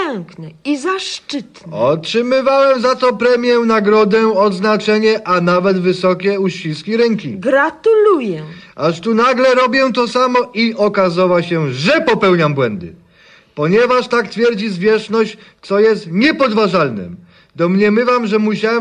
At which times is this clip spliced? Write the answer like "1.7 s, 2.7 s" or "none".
none